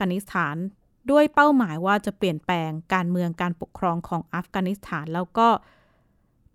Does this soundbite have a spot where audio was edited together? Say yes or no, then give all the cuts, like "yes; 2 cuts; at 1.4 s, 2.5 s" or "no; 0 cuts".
no; 0 cuts